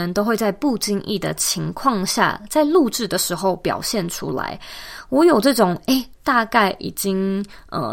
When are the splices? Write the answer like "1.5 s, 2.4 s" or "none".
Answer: 6.2 s